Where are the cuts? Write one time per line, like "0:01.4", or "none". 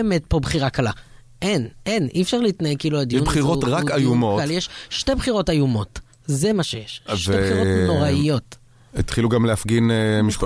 none

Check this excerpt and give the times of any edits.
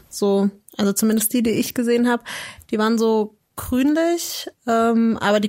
none

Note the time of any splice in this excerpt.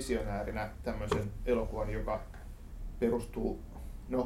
none

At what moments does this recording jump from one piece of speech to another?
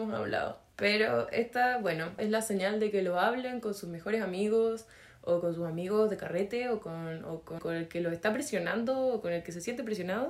0:02.2
0:07.6

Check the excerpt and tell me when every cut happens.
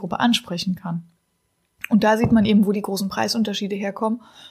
none

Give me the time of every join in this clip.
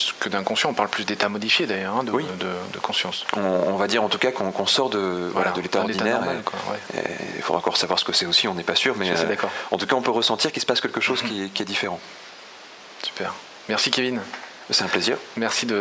none

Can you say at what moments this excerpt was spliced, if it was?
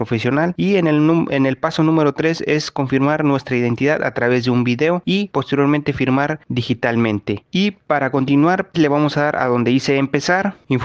0:08.7

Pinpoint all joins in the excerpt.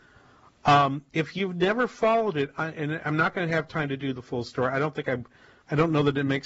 none

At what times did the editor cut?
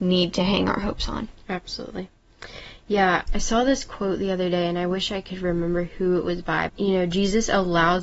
0:03.3
0:06.7

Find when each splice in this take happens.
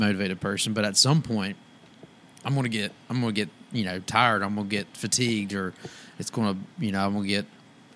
0:03.0

